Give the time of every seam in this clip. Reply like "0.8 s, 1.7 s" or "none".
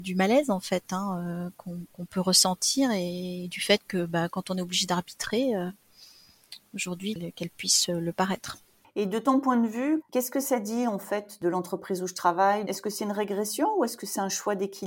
7.1 s, 10.0 s, 12.7 s